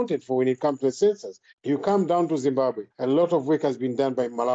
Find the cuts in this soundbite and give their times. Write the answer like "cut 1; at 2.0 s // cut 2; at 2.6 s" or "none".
cut 1; at 1.5 s // cut 2; at 2.9 s